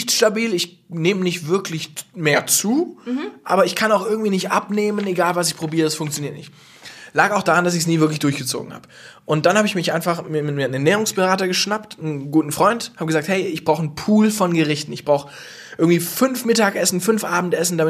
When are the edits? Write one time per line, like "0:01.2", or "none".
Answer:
none